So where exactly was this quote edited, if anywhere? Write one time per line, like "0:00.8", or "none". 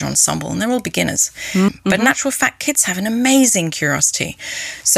0:01.7

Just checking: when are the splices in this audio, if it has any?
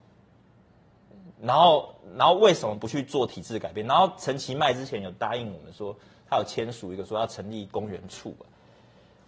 none

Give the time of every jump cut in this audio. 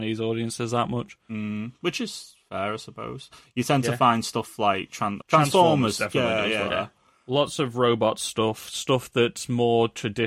0:05.2
0:06.7

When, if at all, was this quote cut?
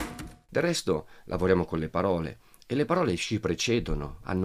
none

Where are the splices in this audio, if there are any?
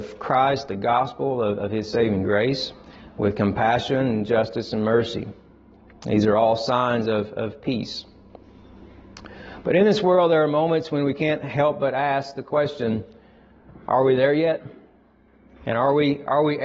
none

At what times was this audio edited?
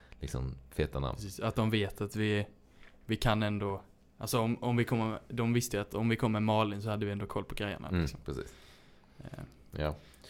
none

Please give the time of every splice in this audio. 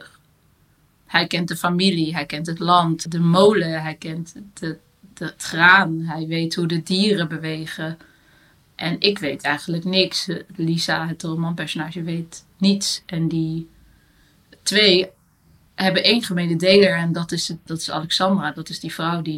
0:03.1
0:17.7

